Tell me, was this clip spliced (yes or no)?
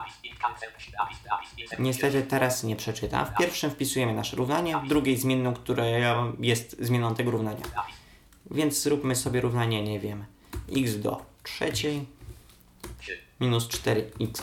no